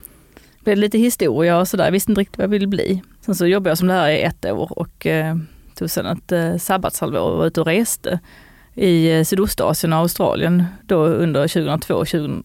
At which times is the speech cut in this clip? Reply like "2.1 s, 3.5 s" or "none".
3.2 s